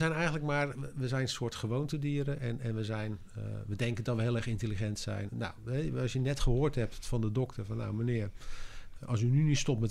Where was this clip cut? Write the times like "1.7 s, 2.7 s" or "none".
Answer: 5.3 s, 9.0 s